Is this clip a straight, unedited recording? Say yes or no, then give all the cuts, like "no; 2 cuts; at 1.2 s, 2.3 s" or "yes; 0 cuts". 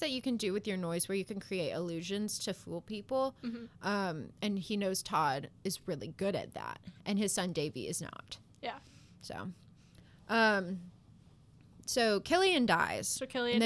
yes; 0 cuts